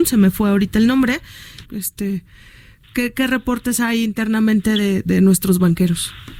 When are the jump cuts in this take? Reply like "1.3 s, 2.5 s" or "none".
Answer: 1.6 s